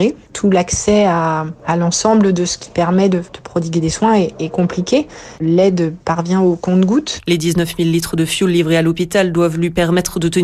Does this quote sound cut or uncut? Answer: uncut